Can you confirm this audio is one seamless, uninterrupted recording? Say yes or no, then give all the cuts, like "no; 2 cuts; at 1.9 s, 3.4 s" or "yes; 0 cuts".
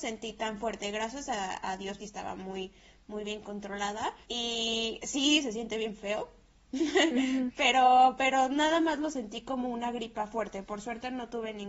no; 2 cuts; at 2.0 s, 4.2 s